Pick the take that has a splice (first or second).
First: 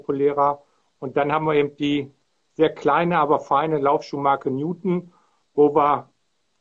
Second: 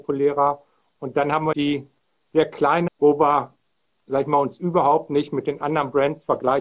second